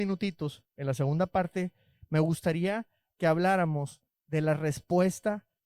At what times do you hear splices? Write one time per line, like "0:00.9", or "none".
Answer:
none